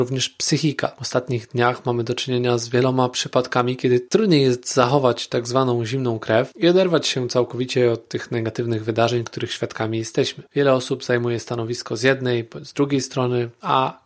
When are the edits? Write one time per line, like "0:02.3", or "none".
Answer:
0:10.5